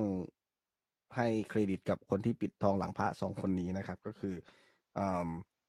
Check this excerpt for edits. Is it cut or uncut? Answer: uncut